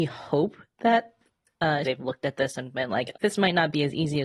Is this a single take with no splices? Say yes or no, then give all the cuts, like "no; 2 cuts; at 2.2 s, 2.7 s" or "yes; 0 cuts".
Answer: no; 2 cuts; at 1.8 s, 3.1 s